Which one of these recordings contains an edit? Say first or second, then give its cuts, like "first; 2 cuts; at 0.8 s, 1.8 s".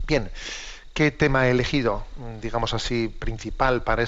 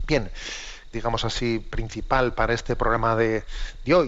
second; 1 cut; at 0.9 s